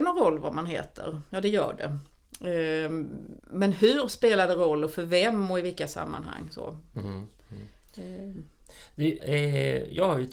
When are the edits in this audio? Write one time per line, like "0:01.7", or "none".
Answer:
0:03.4
0:09.2